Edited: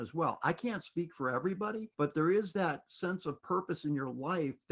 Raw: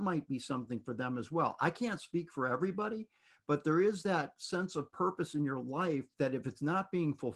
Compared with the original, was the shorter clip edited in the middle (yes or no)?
yes